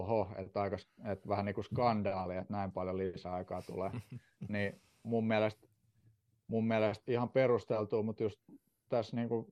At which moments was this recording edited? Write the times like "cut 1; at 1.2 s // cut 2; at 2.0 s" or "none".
cut 1; at 7.0 s